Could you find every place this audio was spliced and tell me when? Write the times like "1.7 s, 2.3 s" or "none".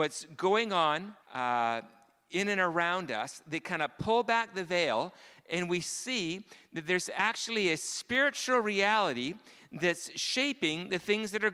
1.2 s

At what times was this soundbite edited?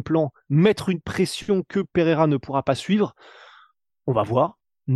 none

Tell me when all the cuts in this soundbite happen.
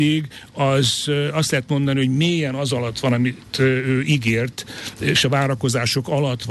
none

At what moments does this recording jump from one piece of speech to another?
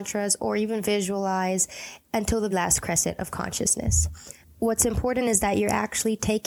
2.5 s, 4.4 s

